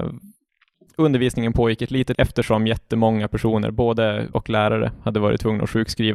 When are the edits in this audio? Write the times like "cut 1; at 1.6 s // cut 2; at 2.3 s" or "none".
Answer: cut 1; at 2.1 s // cut 2; at 4.3 s